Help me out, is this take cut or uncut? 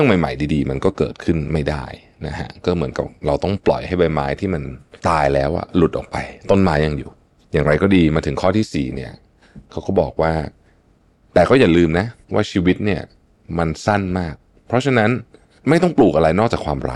cut